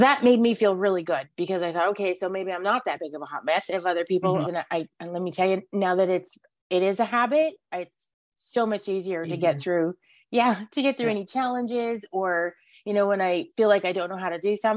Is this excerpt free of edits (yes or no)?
no